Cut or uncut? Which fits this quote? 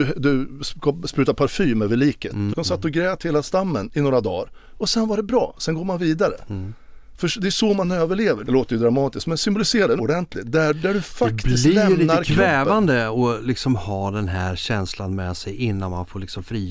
cut